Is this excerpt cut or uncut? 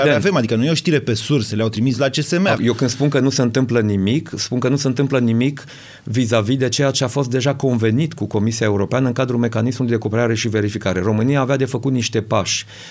cut